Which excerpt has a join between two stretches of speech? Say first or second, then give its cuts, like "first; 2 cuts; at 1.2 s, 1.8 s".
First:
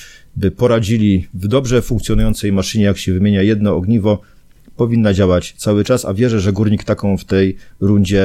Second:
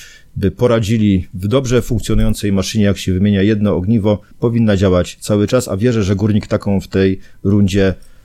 second; 1 cut; at 4.3 s